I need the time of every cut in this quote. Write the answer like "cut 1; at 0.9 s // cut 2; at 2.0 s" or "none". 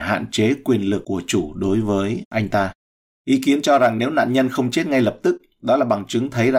cut 1; at 3.1 s